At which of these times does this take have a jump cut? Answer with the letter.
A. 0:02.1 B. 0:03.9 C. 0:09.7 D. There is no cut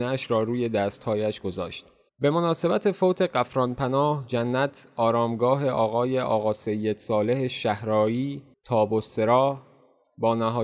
A